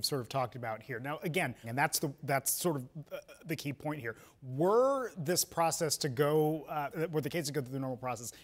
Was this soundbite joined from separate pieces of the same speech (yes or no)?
yes